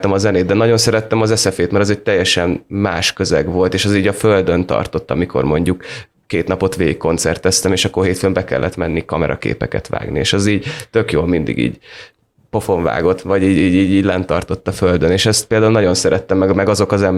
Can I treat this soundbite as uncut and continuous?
yes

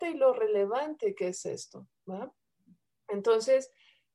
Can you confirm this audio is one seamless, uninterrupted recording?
yes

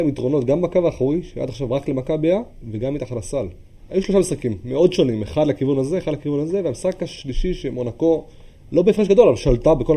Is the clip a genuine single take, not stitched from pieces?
no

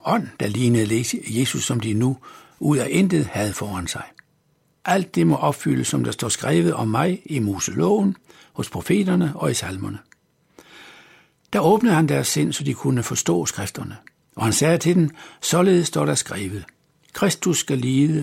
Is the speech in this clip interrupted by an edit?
yes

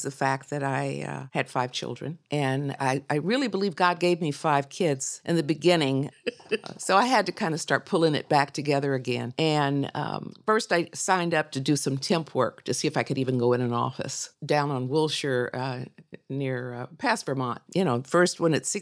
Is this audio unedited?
no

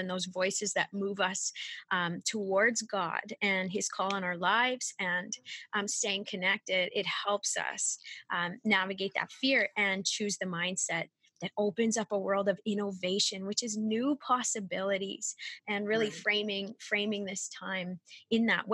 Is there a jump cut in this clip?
no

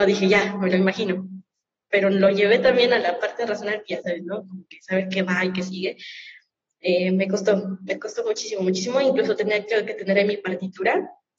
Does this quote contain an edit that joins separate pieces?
no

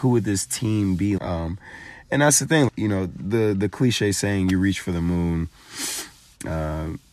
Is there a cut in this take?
yes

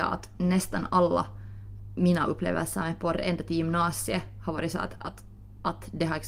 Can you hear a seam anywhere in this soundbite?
no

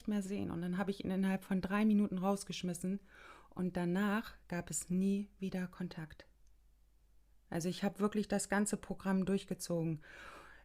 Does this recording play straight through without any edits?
yes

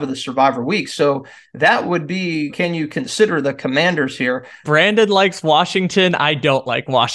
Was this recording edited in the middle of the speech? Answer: yes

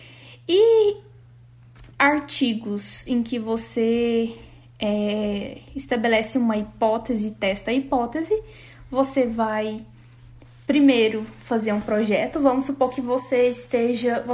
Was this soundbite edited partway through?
no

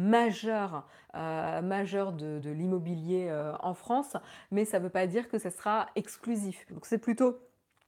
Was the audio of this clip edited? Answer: yes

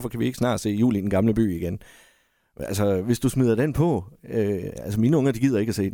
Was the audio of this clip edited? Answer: no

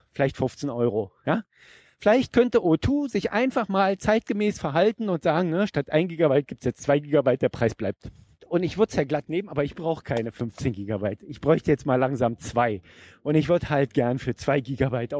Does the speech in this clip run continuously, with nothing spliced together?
no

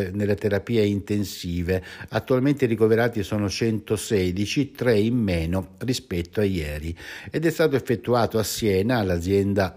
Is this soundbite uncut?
yes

